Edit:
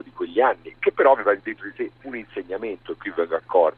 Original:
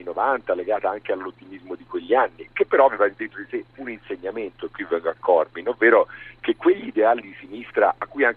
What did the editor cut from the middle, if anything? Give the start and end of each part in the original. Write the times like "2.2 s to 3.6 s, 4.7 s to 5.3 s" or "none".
none